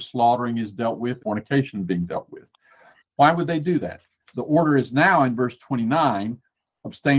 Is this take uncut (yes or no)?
no